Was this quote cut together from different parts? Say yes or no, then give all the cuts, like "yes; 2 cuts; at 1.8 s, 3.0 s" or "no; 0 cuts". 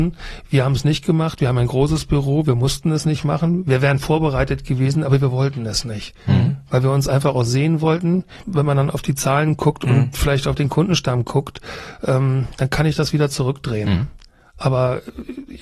yes; 1 cut; at 8.4 s